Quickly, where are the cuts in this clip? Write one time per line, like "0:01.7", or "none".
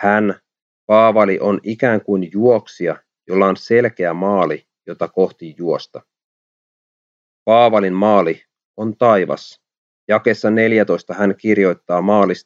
none